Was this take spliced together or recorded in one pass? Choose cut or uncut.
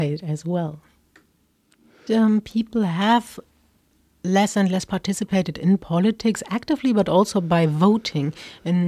cut